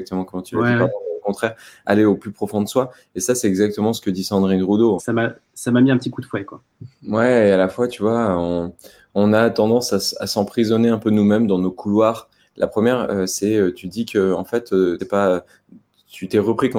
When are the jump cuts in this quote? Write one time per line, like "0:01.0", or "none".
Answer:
0:05.0
0:12.4
0:15.0